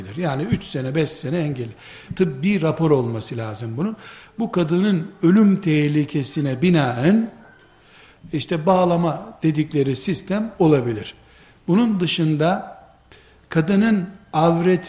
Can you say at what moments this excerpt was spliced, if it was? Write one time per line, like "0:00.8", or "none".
0:02.1